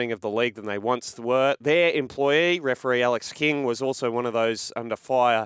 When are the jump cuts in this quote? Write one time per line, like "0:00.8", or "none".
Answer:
none